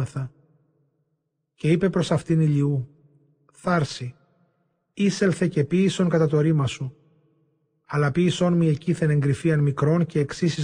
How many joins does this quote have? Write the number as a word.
zero